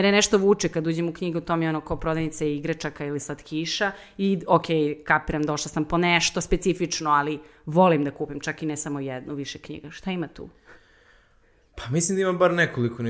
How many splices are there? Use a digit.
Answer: 0